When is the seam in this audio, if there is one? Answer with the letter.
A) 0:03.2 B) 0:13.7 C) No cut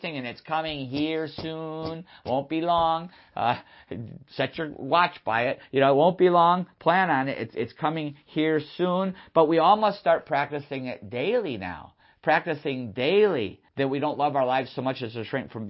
B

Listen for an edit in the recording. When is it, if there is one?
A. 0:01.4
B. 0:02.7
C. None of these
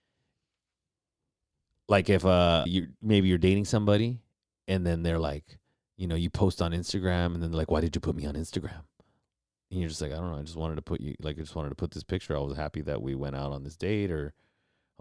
B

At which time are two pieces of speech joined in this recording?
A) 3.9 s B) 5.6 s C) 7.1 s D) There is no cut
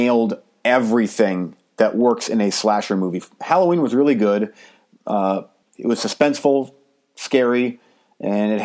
B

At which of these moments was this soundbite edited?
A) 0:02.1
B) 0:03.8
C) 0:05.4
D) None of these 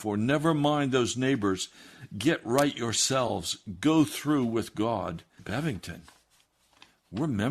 C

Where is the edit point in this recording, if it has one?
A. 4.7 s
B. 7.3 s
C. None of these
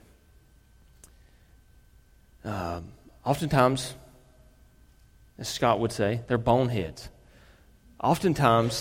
C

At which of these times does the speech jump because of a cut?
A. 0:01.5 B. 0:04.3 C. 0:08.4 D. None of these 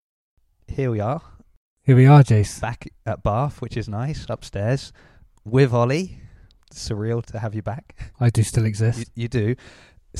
D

